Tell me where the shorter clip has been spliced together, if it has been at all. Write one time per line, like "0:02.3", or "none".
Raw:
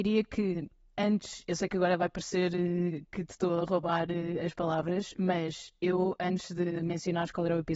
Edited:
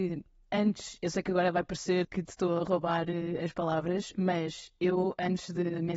0:02.0